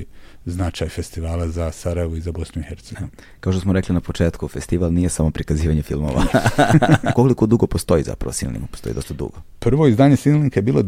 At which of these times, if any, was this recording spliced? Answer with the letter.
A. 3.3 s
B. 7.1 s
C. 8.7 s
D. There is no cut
B